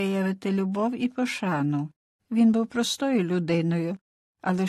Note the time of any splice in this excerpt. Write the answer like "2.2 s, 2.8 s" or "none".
2.2 s